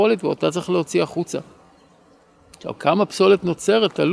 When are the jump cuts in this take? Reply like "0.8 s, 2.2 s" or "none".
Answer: none